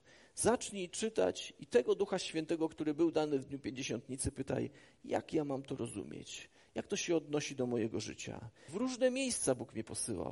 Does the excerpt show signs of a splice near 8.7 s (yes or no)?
yes